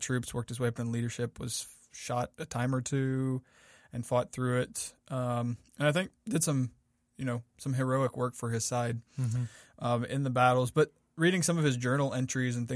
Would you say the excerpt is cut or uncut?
uncut